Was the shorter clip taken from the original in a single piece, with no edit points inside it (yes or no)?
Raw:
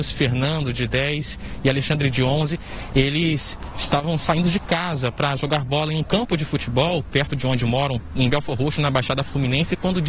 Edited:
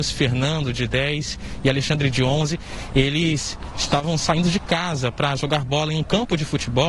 yes